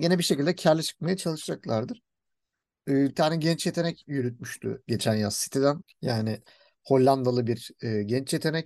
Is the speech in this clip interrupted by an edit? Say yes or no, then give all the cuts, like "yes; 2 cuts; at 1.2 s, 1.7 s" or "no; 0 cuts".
yes; 2 cuts; at 3.1 s, 5.8 s